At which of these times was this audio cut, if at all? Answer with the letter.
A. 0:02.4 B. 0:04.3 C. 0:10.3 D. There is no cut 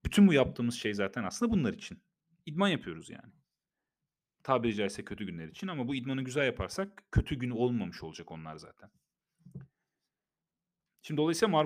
A